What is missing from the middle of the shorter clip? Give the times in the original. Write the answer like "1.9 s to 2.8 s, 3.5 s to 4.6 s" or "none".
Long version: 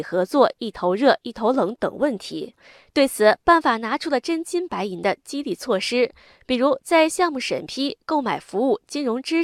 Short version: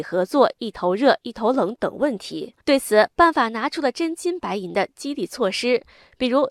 2.6 s to 2.9 s